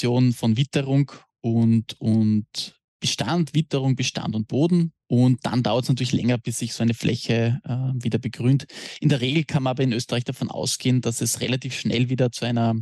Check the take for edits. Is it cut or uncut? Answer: cut